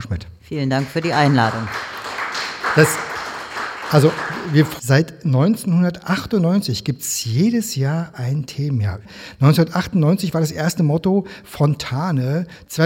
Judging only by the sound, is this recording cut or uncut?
uncut